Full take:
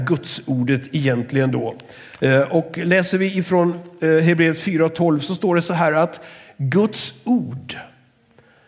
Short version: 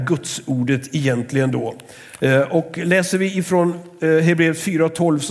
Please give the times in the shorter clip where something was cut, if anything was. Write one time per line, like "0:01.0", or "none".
none